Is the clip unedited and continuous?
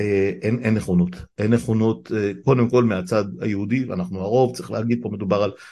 yes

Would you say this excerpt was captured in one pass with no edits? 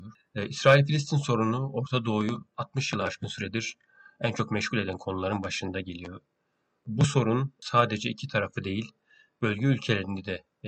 yes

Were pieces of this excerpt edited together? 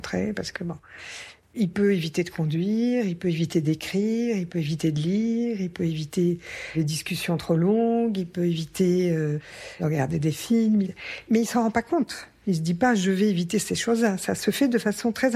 no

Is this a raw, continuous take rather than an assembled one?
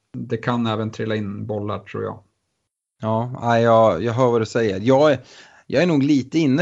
yes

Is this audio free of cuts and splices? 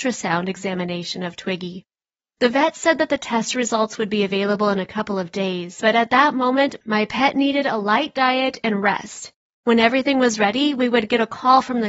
yes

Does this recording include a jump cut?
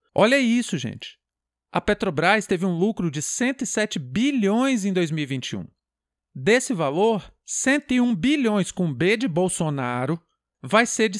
no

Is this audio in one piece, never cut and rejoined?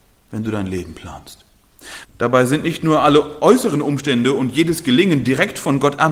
no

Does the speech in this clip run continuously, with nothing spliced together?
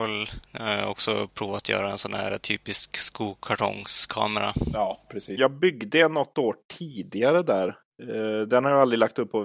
no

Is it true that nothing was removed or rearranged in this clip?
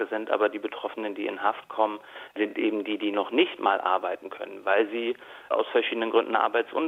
yes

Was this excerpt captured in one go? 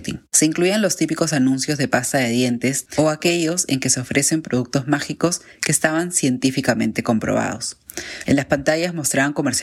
no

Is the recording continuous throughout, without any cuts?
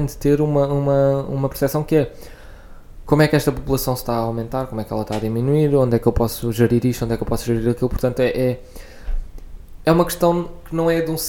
yes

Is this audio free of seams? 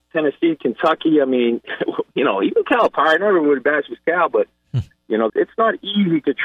no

